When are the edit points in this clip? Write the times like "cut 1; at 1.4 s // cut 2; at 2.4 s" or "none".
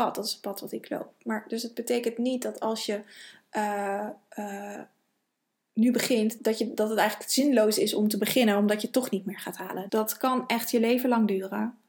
cut 1; at 6.4 s // cut 2; at 9.9 s